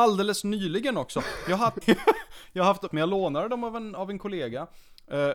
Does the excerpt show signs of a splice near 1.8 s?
yes; 2 cuts; at 1.8 s, 2.9 s

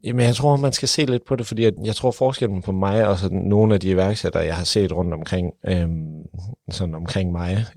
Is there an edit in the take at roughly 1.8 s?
yes; 1 cut; at 1.8 s

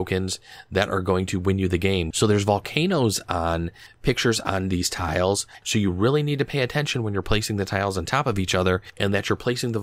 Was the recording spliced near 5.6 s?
yes; 2 cuts; at 2.1 s, 5.6 s

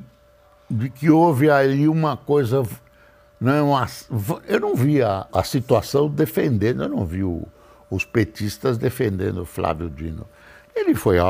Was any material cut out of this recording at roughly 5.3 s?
yes; 1 cut; at 5.3 s

